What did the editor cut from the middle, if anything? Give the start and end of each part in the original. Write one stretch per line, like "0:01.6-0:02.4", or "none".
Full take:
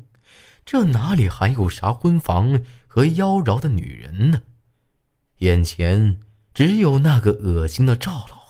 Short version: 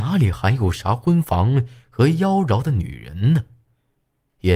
none